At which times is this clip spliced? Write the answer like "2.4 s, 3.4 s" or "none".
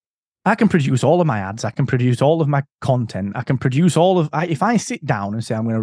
none